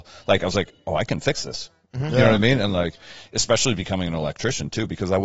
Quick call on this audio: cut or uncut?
uncut